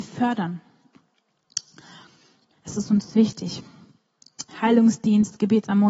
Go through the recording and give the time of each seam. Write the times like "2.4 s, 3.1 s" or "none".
2.5 s, 4.5 s

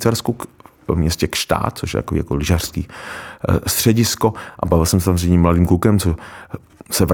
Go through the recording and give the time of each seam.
none

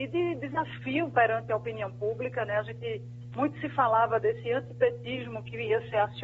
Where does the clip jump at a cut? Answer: none

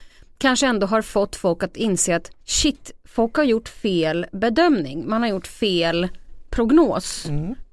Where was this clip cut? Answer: 2.4 s

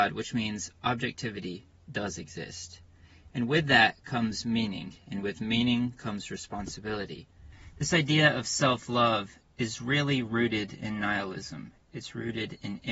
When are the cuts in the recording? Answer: 11.7 s

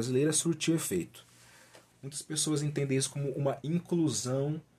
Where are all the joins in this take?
1.9 s

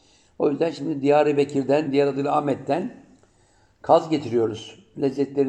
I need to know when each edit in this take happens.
1.9 s

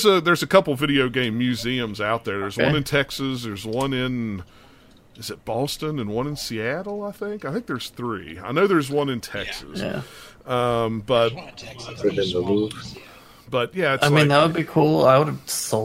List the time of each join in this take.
none

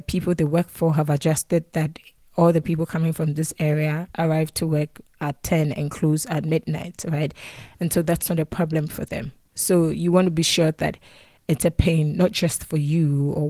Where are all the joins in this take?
none

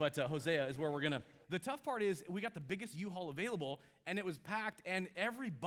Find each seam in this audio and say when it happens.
1.4 s

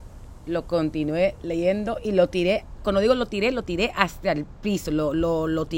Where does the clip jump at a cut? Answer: none

